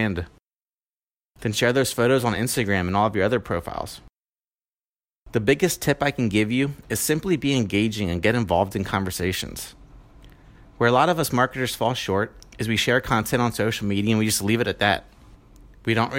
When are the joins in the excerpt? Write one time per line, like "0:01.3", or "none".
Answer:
none